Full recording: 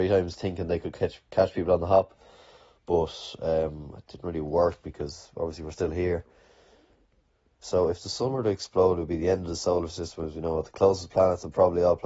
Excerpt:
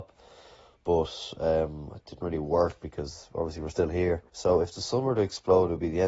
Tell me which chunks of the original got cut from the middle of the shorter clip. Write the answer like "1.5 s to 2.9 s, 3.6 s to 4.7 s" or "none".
6.3 s to 7.5 s

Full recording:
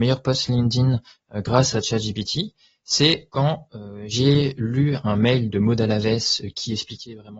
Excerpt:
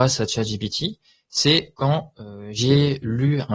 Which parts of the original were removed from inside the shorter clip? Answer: none

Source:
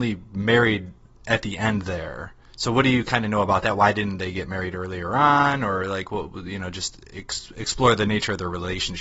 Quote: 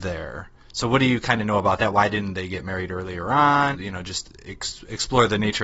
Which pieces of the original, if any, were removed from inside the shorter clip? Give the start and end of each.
5.6 s to 6.4 s

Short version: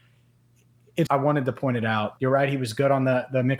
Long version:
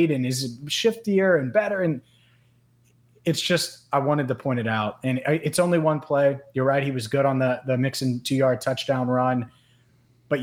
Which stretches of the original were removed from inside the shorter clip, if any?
3.4 s to 3.9 s, 5.0 s to 6.5 s

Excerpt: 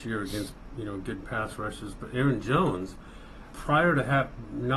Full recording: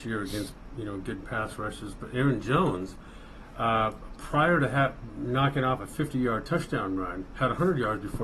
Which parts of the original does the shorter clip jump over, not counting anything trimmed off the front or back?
3.5 s to 4.2 s

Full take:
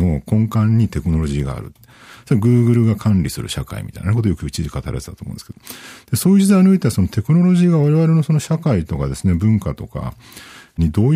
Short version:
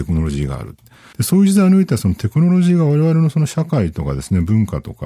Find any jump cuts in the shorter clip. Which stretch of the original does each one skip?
2.1 s to 6.0 s

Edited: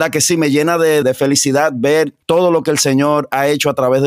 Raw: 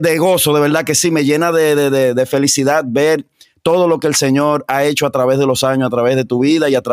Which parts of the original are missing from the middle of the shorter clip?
1.8 s to 2.1 s, 3.3 s to 3.6 s

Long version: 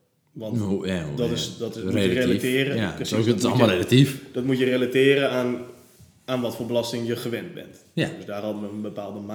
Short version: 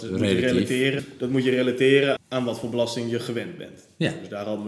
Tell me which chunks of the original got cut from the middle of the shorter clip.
2.7 s to 4.1 s, 5.3 s to 6.1 s

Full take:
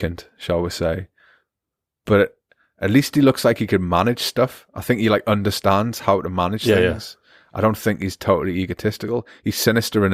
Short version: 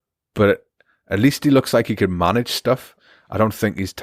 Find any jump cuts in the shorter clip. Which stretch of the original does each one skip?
4.7 s to 7.2 s

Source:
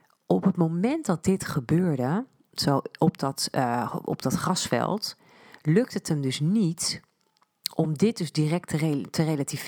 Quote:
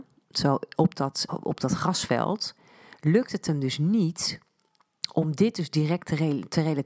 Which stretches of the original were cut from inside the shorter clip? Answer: 3.5 s to 3.9 s

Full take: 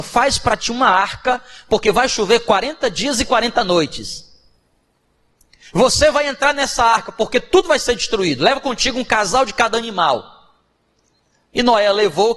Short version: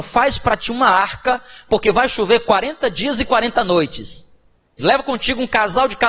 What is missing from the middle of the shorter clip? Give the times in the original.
4.8 s to 8.4 s

